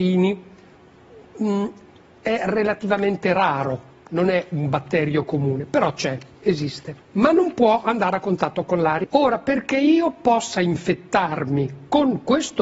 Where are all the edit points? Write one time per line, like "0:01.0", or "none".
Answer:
0:07.0
0:09.0